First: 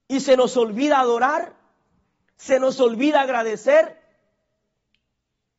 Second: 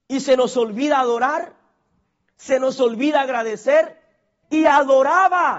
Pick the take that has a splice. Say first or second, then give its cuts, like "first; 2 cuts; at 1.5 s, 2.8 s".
second; 1 cut; at 4.4 s